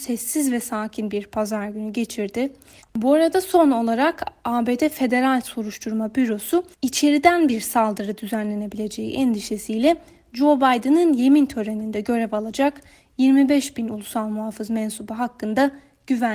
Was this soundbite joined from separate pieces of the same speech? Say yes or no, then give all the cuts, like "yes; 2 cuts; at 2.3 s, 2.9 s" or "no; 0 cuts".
yes; 2 cuts; at 2.8 s, 6.7 s